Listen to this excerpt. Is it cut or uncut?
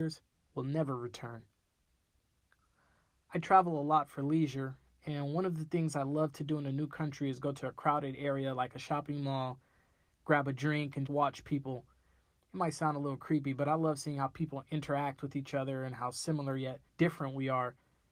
cut